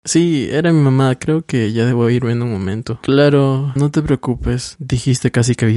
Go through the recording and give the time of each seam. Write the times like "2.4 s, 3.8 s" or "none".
3.8 s

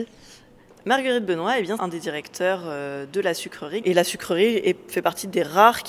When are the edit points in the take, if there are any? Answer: 1.8 s, 3.8 s

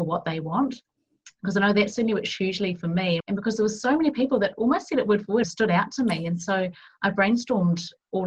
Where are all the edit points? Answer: 3.2 s, 5.4 s

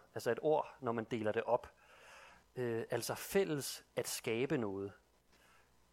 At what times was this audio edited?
none

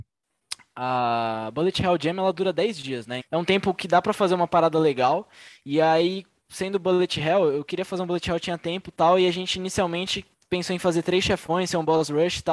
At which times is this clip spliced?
3.2 s

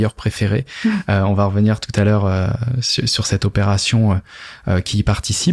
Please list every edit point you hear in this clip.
none

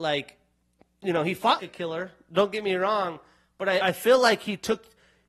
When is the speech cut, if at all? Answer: 1.6 s, 3.8 s

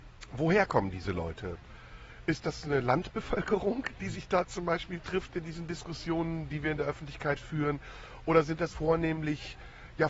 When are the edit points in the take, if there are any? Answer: 8.7 s

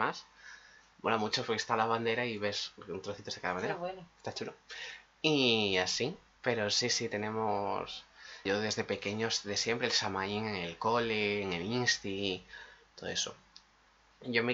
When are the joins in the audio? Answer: 8.4 s

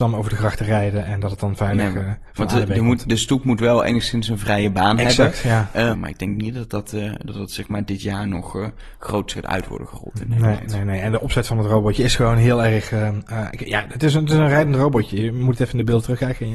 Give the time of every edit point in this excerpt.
5.9 s

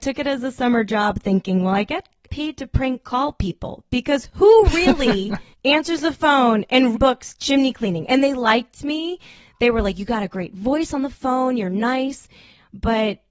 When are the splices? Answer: 6.9 s

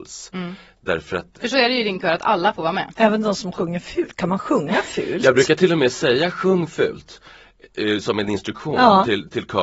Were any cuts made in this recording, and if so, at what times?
2.9 s

